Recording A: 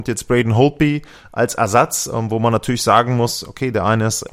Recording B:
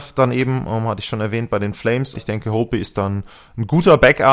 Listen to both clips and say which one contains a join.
B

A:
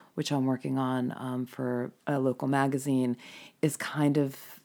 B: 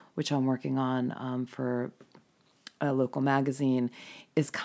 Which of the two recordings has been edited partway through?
A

